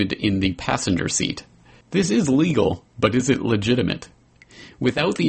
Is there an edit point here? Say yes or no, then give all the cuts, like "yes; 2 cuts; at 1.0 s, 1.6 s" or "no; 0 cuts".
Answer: yes; 1 cut; at 1.8 s